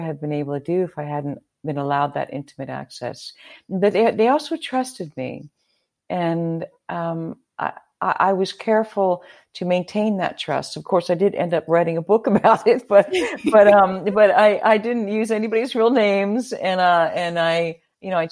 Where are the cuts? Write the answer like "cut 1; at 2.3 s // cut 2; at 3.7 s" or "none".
none